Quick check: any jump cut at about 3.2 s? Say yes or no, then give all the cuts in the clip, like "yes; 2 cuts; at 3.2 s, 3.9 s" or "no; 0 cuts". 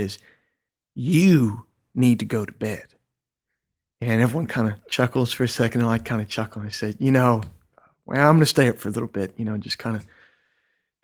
no; 0 cuts